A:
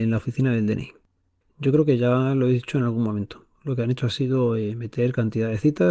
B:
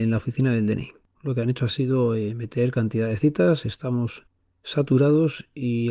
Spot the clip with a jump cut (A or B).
B